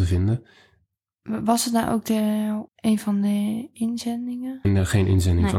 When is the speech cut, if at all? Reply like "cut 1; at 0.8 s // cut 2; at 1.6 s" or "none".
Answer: cut 1; at 2.7 s // cut 2; at 4.6 s